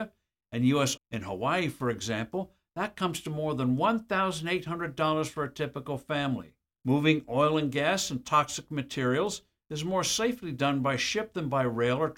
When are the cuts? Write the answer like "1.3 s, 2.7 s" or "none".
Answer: 1.0 s, 6.8 s